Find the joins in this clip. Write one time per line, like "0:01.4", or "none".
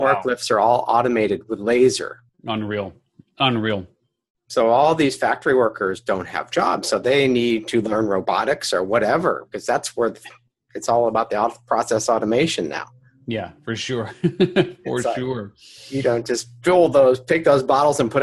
0:02.3